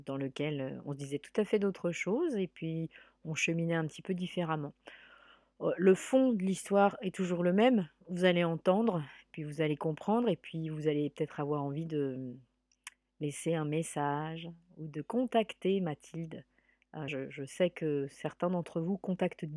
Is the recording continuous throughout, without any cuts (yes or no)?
no